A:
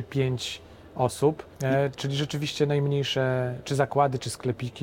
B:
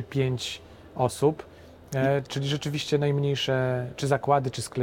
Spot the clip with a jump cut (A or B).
A